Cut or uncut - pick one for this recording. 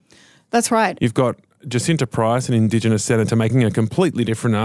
cut